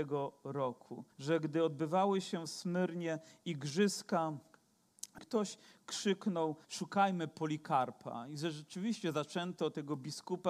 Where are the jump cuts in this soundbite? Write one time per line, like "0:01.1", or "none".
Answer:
0:01.1
0:05.2
0:06.6